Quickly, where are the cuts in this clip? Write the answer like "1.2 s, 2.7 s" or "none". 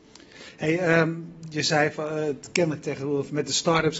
2.8 s

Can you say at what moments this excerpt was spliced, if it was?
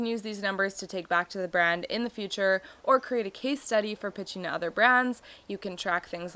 none

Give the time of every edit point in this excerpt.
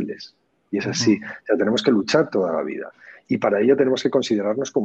none

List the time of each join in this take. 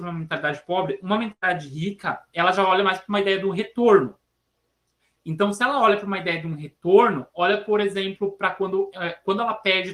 none

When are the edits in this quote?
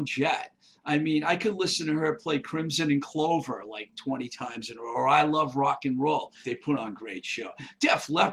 6.4 s

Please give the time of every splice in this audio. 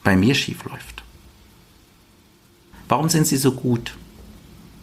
2.7 s

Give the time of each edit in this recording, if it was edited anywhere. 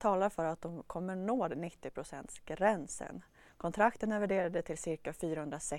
3.5 s

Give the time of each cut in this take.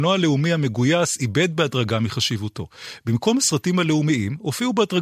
none

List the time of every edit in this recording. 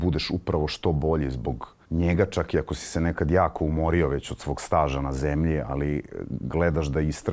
1.9 s

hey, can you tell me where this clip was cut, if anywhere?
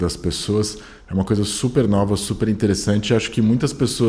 none

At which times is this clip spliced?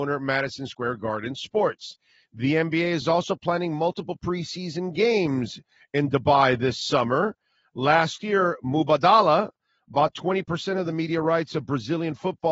none

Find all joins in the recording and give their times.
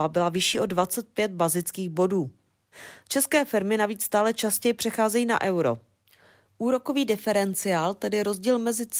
3.0 s

